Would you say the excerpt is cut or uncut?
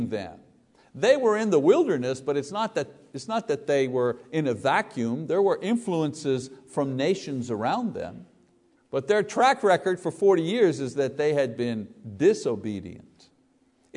cut